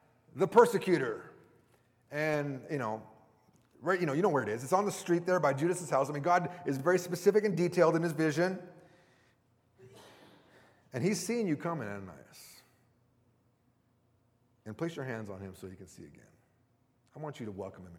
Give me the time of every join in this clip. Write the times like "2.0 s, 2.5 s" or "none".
none